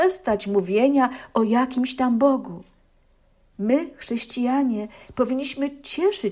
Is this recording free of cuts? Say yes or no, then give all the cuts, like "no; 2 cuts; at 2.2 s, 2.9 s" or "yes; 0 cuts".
no; 1 cut; at 3.5 s